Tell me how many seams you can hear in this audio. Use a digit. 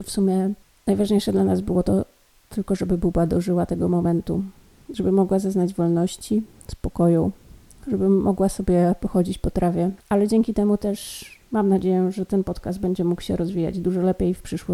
1